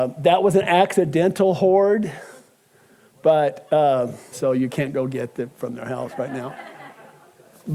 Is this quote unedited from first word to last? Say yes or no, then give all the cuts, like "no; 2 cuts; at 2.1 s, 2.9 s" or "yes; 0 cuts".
no; 1 cut; at 4.3 s